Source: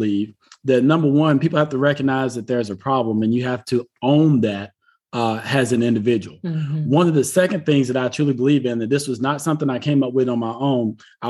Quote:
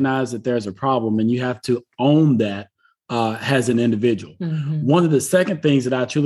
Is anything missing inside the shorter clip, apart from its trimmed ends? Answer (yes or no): no